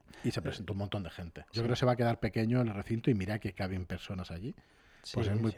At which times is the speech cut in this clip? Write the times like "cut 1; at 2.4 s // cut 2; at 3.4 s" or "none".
cut 1; at 1.5 s